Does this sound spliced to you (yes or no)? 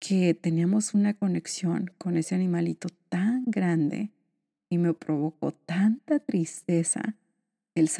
no